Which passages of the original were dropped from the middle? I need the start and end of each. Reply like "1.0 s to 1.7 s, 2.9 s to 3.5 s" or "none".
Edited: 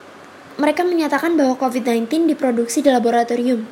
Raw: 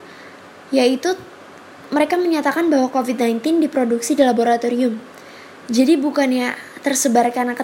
none